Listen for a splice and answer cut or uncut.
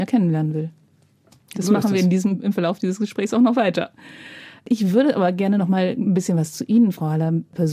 uncut